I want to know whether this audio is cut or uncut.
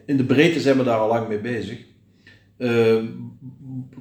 uncut